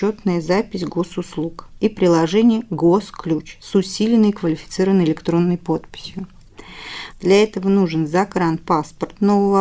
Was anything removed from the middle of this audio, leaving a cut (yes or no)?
yes